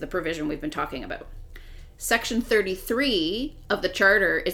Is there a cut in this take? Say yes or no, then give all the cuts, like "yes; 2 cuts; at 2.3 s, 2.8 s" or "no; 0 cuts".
no; 0 cuts